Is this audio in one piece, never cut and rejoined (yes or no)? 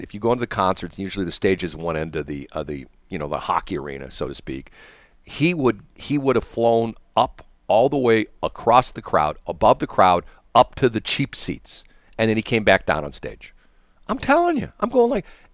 yes